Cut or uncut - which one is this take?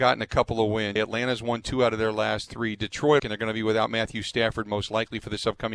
cut